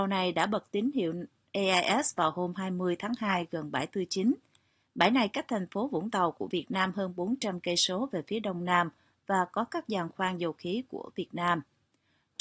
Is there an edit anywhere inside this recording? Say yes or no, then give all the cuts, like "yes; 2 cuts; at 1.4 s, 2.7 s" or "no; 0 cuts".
no; 0 cuts